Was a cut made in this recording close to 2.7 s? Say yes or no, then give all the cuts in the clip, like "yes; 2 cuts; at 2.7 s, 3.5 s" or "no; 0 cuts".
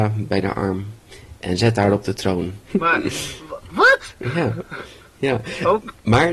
yes; 1 cut; at 2.7 s